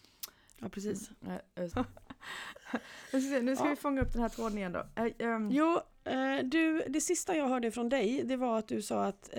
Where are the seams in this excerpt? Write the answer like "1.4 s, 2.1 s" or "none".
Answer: 1.7 s